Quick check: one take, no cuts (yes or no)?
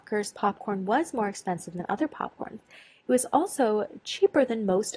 yes